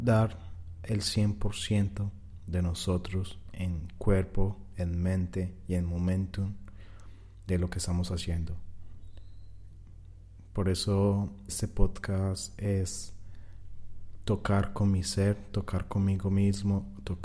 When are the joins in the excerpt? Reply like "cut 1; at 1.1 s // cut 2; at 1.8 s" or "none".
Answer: cut 1; at 11.5 s

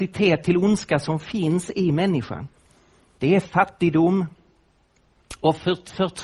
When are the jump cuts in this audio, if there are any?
cut 1; at 3.2 s

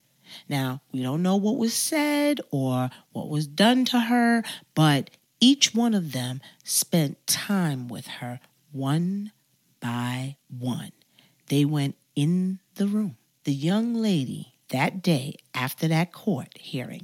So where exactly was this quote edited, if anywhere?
cut 1; at 13.4 s // cut 2; at 14.6 s

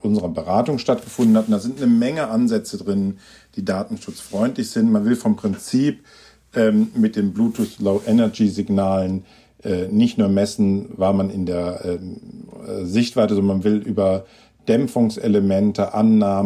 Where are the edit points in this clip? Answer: none

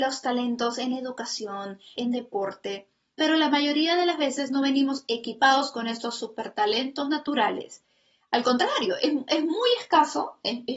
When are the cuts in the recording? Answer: cut 1; at 2.0 s

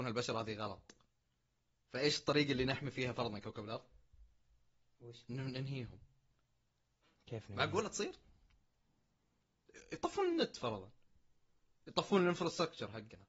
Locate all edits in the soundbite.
none

